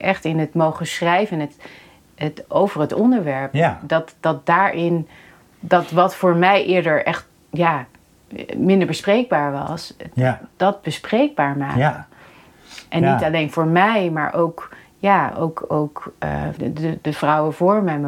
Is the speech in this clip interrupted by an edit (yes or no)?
yes